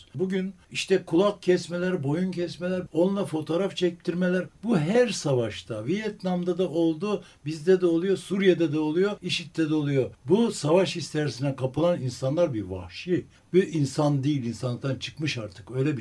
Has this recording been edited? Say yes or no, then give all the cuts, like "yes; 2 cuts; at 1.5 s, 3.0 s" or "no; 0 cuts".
no; 0 cuts